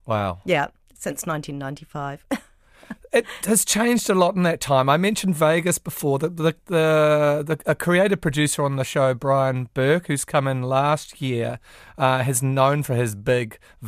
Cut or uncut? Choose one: uncut